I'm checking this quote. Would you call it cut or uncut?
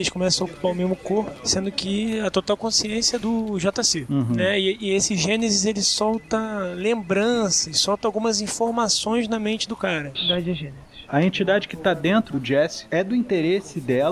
cut